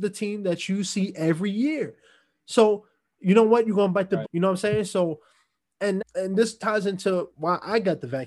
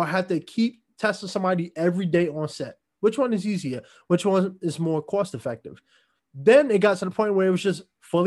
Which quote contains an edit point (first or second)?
first